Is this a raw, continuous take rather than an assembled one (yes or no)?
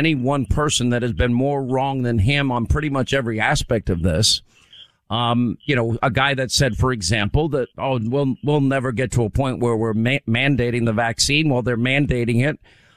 yes